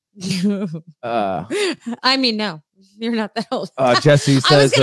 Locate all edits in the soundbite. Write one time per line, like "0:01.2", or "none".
none